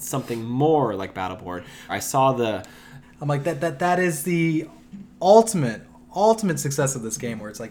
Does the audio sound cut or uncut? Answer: cut